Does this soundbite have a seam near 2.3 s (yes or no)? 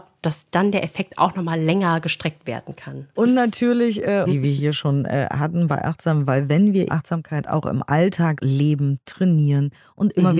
no